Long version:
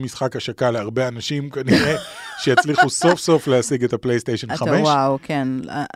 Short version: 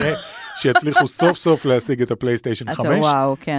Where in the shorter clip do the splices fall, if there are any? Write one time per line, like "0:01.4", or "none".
none